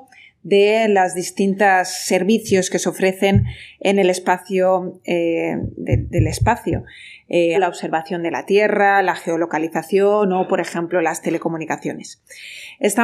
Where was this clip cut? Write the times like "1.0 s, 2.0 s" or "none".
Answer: 7.5 s